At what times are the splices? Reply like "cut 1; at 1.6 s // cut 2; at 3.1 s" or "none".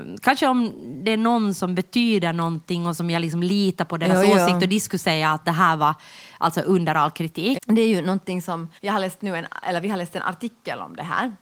cut 1; at 7.5 s // cut 2; at 8.8 s